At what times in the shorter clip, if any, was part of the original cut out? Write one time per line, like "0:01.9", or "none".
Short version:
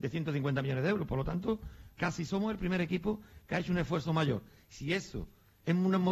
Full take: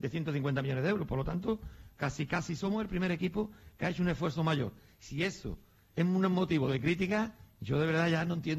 0:02.0